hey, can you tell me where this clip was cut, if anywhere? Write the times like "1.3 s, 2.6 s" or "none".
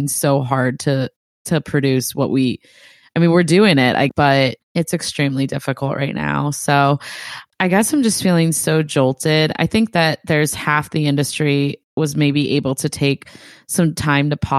none